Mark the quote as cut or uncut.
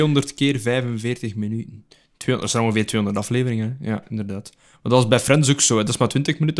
uncut